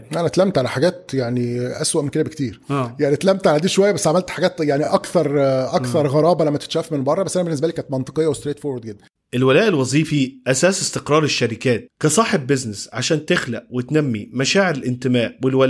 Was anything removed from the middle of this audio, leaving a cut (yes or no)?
no